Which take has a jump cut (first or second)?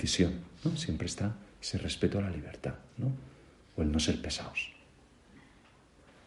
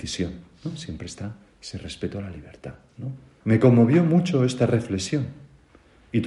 second